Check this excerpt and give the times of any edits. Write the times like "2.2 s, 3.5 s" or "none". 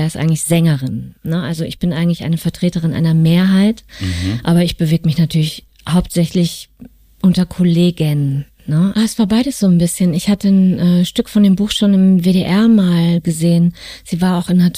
8.9 s